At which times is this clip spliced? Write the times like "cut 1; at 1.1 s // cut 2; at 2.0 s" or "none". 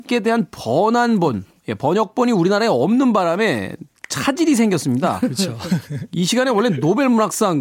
none

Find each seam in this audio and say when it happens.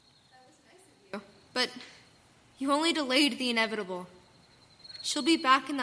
cut 1; at 1.5 s

